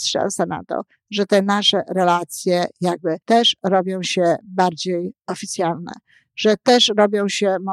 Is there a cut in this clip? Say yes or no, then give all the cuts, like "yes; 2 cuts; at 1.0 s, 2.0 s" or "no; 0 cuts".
yes; 1 cut; at 3.2 s